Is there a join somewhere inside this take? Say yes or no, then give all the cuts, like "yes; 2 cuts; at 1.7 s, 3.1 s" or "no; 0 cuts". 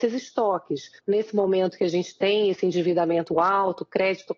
yes; 1 cut; at 1.0 s